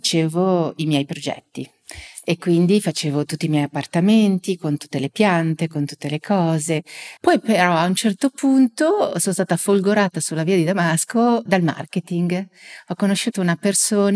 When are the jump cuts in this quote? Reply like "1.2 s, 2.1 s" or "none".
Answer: 7.2 s, 11.5 s